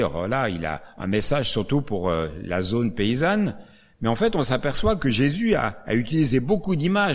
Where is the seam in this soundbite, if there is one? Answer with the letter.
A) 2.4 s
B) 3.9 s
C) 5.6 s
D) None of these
D